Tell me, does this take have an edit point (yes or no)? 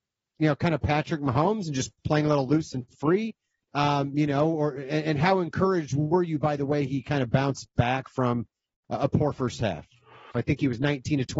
yes